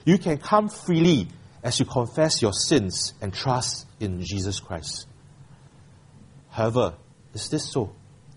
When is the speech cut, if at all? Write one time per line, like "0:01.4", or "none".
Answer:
0:07.2